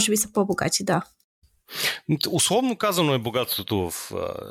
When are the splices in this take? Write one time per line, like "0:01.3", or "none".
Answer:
none